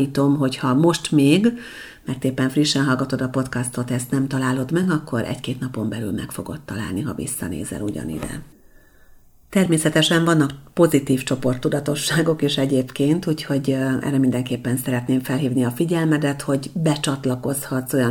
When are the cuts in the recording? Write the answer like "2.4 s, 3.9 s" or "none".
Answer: none